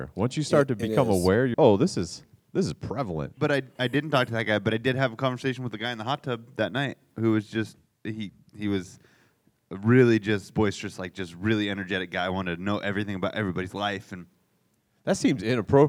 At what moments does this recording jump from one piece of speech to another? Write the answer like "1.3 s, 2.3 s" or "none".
1.5 s